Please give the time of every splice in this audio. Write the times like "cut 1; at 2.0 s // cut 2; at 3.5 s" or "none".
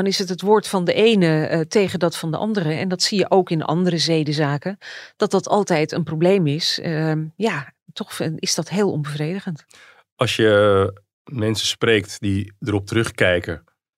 none